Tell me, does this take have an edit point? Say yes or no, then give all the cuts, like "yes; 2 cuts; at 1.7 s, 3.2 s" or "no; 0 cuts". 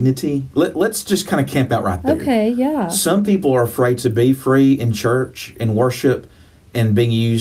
no; 0 cuts